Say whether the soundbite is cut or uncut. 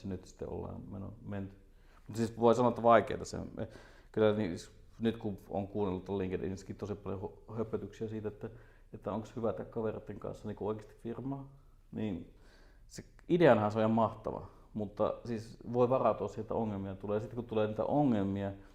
uncut